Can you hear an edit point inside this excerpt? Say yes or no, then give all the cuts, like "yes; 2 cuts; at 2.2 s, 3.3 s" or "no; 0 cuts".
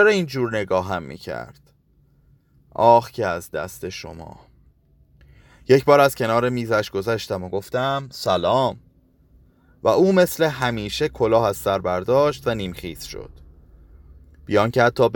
no; 0 cuts